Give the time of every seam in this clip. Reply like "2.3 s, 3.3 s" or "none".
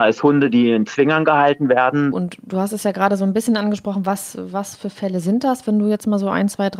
2.1 s

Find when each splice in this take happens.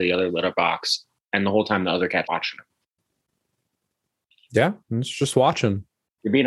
2.2 s

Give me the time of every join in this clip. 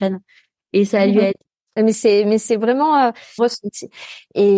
1.8 s, 3.4 s

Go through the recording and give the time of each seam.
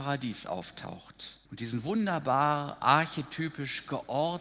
1.5 s

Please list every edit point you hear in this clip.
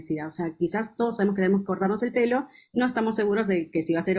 none

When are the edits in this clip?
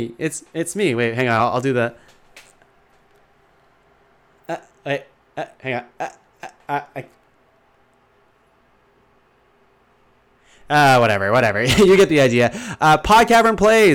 none

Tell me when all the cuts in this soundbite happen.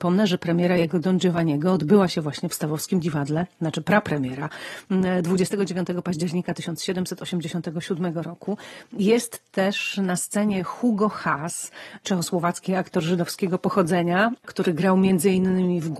12.0 s

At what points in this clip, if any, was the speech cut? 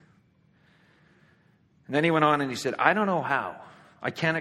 none

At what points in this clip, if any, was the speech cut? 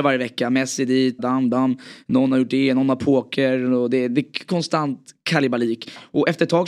1.2 s

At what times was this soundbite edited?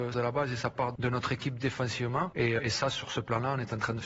2.6 s

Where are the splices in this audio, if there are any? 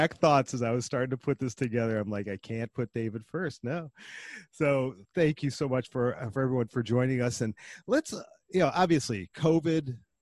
5.0 s

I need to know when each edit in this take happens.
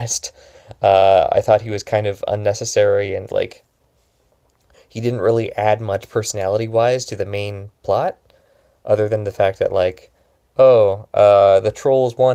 3.3 s

